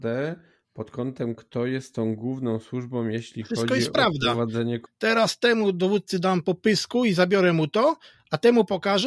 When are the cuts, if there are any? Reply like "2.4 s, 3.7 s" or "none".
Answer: 4.9 s